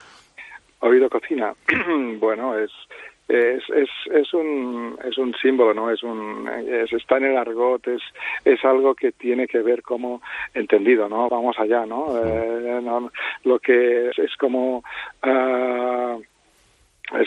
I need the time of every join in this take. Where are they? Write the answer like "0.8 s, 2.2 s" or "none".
11.3 s, 14.1 s